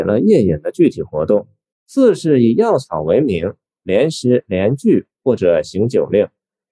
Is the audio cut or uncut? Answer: cut